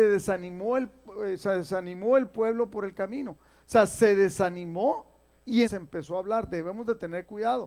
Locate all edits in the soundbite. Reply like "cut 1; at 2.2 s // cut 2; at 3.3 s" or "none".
cut 1; at 5.6 s